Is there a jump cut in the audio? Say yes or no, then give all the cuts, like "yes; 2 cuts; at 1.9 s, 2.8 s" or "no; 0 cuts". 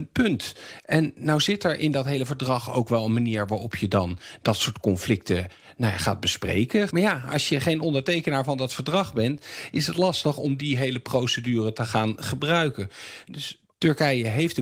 yes; 1 cut; at 6.9 s